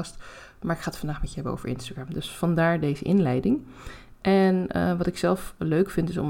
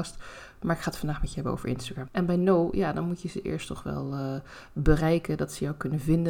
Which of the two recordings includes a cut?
second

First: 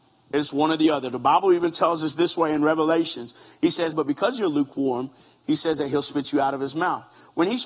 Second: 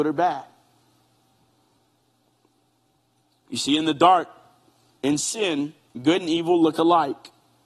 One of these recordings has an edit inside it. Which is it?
first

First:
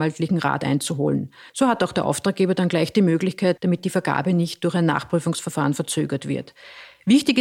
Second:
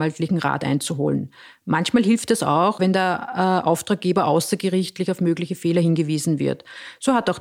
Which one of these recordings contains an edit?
first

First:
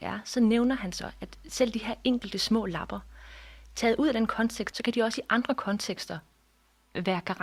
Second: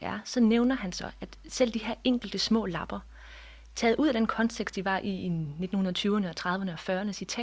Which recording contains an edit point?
first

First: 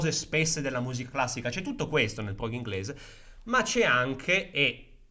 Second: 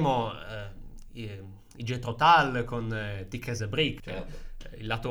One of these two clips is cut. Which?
second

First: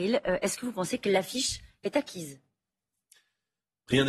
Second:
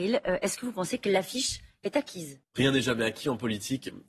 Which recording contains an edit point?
second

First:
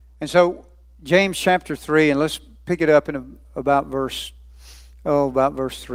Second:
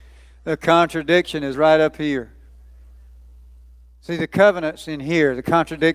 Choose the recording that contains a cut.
second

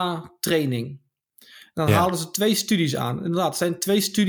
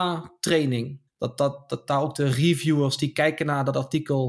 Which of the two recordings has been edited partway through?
second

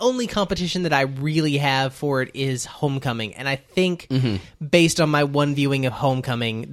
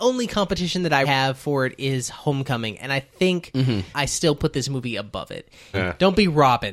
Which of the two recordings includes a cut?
second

